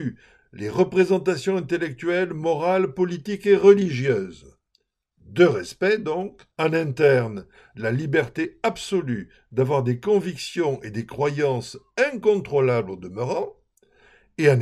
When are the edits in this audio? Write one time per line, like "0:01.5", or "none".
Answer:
0:06.5